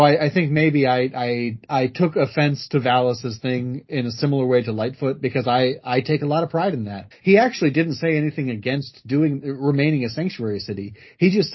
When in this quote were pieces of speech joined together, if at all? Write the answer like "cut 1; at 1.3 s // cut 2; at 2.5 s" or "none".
cut 1; at 7.1 s